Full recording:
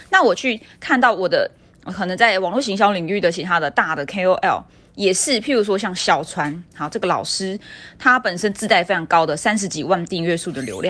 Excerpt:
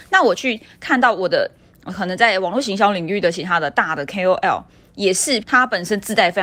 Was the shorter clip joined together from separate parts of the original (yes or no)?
yes